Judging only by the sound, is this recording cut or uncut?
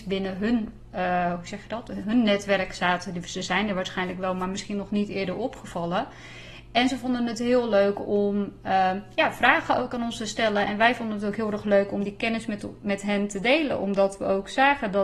uncut